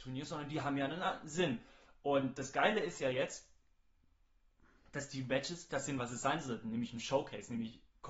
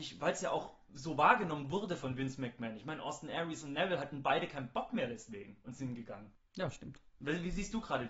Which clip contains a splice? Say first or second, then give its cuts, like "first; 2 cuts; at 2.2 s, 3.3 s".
first; 1 cut; at 5.7 s